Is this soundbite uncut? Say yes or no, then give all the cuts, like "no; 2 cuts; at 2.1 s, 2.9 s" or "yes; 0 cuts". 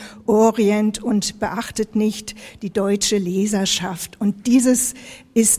yes; 0 cuts